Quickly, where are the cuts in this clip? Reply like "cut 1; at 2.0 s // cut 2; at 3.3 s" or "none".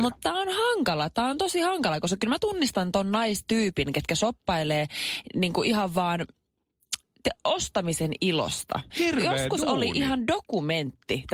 cut 1; at 8.9 s